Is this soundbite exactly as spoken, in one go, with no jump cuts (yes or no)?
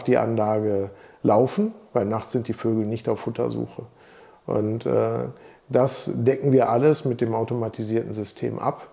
yes